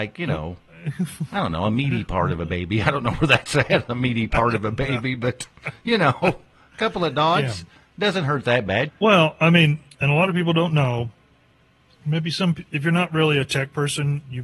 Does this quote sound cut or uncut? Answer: cut